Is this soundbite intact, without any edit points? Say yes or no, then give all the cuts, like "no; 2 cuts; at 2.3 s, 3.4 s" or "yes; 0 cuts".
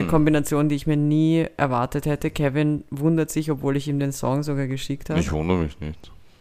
yes; 0 cuts